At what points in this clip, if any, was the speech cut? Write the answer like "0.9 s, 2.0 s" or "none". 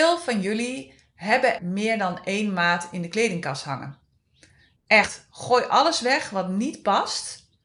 1.6 s, 4.8 s